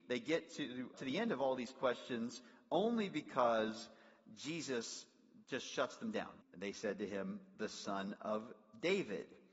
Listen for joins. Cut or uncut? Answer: cut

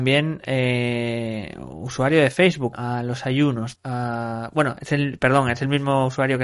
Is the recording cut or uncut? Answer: cut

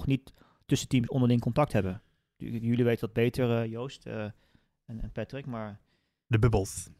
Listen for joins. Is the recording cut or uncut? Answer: uncut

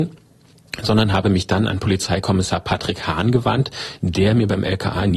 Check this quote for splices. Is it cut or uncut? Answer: uncut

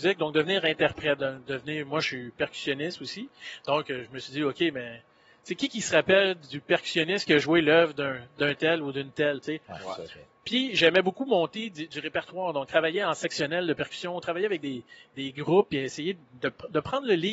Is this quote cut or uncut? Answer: uncut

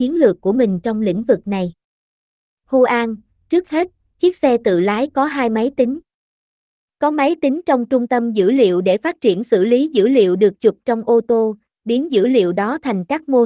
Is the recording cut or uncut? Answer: uncut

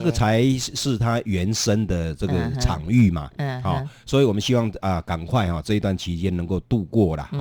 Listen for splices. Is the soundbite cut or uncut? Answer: uncut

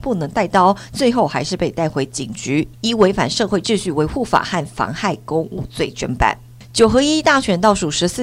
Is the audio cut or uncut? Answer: uncut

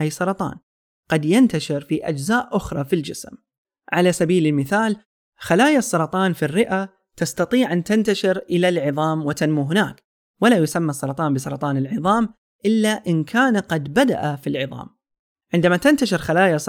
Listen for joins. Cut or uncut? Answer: cut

